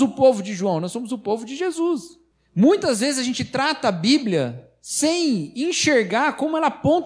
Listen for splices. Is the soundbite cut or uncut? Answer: uncut